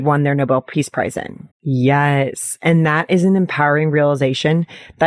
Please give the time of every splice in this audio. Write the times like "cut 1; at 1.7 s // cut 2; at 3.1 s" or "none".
cut 1; at 1.5 s

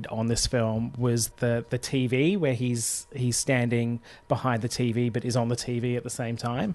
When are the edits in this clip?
cut 1; at 1.3 s

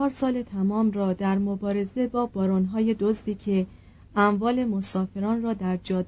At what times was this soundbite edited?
none

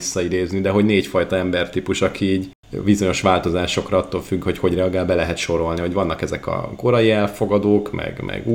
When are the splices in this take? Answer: none

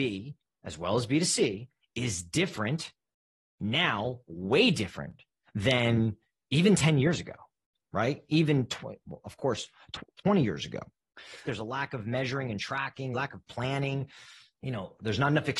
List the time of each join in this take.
cut 1; at 10.1 s // cut 2; at 11.4 s // cut 3; at 13.1 s

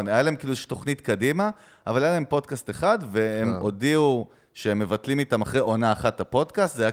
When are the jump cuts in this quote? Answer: none

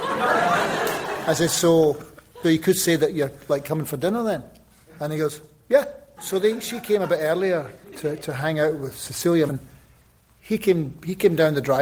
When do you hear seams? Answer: cut 1; at 2.4 s // cut 2; at 6.2 s // cut 3; at 9.5 s

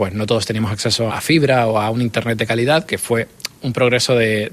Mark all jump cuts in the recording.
cut 1; at 1.1 s // cut 2; at 2.9 s

